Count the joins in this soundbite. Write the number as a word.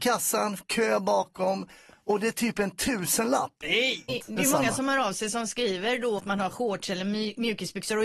two